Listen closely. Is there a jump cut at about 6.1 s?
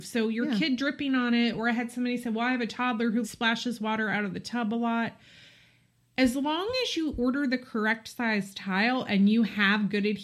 no; 1 cut; at 3.2 s

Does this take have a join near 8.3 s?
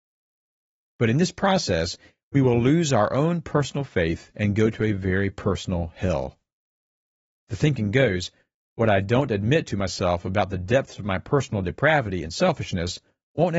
no; 0 cuts

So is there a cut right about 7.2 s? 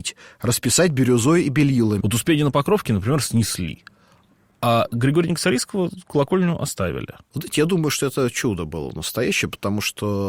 no; 1 cut; at 2.0 s

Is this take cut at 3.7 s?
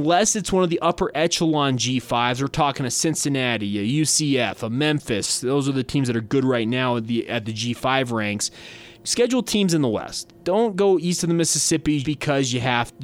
no; 2 cuts; at 8.9 s, 12.0 s

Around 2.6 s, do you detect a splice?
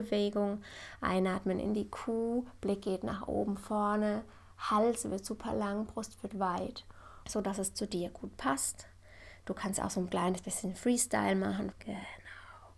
no; 2 cuts; at 7.2 s, 11.7 s

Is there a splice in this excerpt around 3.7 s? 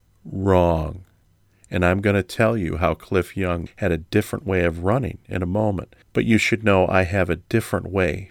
yes; 2 cuts; at 3.7 s, 6.0 s

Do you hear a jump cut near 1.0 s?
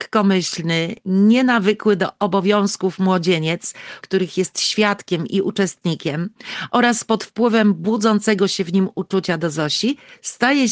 no; 1 cut; at 4.0 s

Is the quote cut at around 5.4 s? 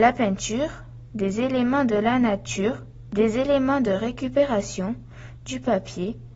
no; 2 cuts; at 1.1 s, 3.1 s

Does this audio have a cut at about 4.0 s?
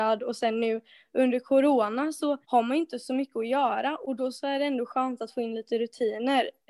no; 1 cut; at 2.4 s

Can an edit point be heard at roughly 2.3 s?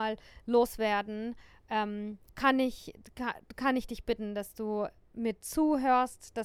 yes; 1 cut; at 2.3 s

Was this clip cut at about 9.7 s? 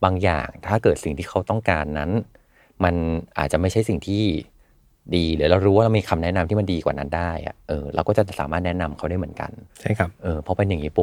yes; 1 cut; at 9.7 s

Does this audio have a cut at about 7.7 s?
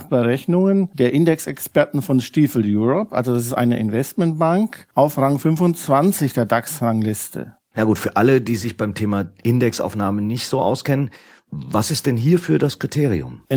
yes; 1 cut; at 7.7 s

